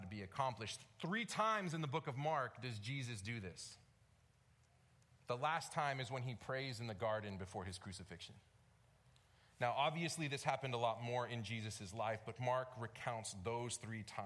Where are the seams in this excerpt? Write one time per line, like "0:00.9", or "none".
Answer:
none